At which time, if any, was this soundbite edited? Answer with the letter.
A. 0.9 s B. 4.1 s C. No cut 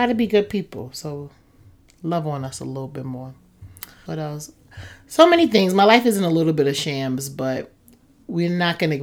B